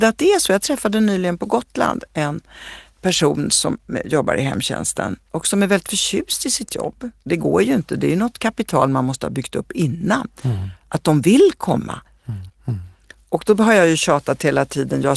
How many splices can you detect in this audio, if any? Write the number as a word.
two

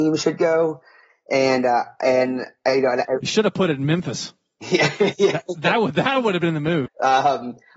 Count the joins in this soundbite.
one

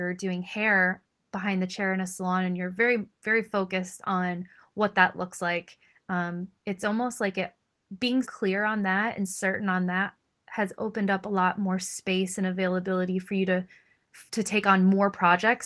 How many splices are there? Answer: three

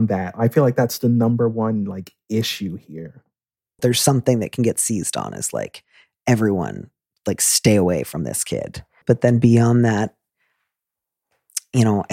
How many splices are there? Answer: two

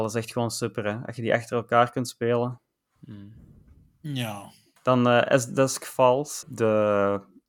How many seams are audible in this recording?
one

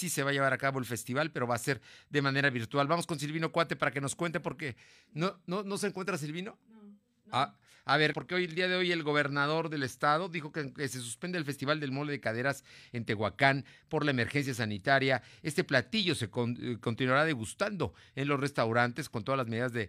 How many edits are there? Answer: one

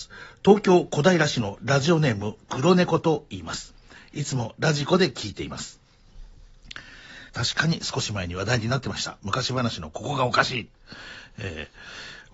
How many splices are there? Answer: one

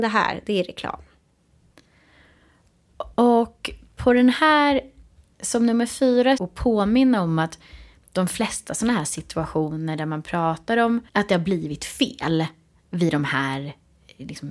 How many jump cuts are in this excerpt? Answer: two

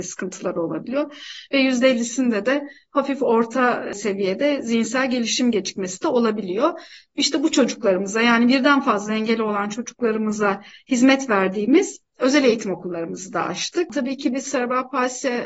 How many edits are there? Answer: one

